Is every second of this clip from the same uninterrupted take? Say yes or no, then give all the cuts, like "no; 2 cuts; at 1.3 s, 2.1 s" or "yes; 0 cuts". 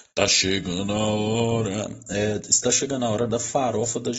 yes; 0 cuts